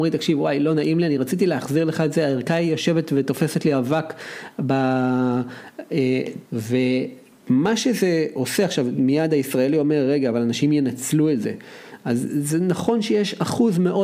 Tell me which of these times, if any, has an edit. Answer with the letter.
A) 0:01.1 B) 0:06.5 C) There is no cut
B